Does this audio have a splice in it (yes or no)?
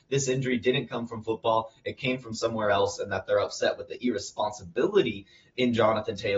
no